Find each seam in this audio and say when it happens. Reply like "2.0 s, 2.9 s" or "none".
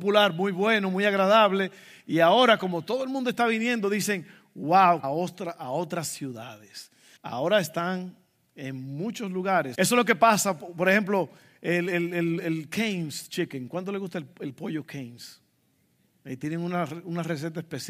5.0 s, 7.2 s, 9.7 s